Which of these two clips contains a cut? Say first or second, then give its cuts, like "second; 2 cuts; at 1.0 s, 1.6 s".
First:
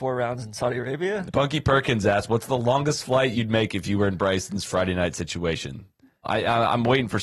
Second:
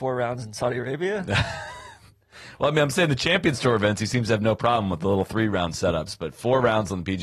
first; 2 cuts; at 1.3 s, 6.2 s